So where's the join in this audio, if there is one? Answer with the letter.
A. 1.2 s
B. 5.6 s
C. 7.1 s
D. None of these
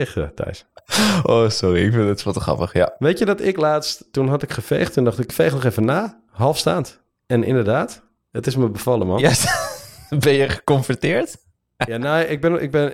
D